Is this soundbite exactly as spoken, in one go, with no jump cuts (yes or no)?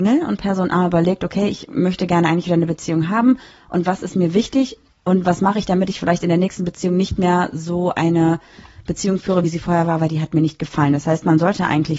yes